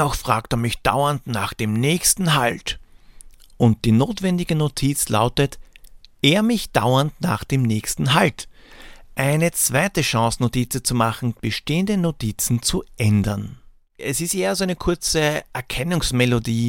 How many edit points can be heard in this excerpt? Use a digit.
3